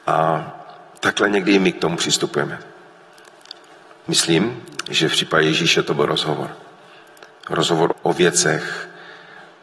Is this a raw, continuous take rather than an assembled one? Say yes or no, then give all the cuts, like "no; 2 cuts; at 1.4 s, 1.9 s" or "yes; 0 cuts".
no; 1 cut; at 7.9 s